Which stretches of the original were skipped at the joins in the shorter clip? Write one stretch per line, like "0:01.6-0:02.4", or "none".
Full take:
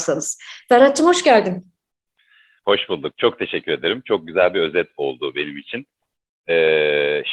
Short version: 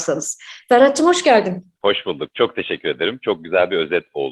0:01.8-0:02.6